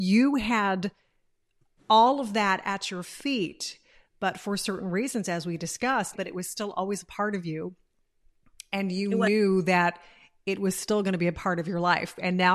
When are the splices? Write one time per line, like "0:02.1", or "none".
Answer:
0:06.1